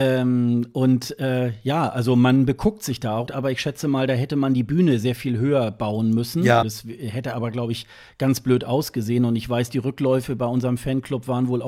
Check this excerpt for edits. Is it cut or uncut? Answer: cut